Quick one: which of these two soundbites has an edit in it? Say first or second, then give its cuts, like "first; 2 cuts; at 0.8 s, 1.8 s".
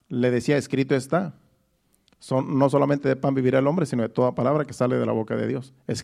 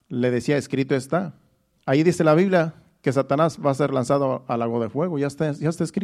second; 1 cut; at 1.8 s